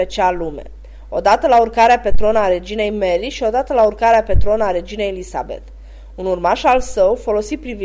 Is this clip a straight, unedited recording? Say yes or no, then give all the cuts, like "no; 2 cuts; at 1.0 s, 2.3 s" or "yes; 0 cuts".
yes; 0 cuts